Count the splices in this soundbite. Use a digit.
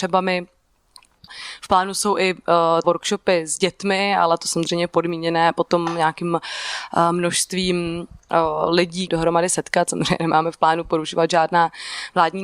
2